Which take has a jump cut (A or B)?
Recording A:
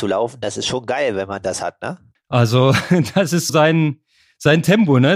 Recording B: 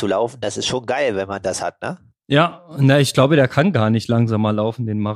A